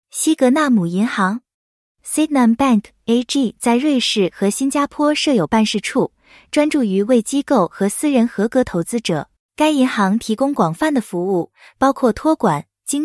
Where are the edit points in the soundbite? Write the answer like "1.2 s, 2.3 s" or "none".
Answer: 9.4 s